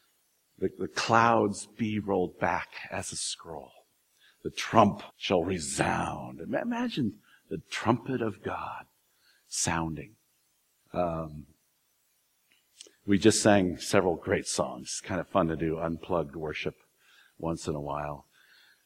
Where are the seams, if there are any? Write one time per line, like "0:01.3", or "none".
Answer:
0:05.1
0:10.8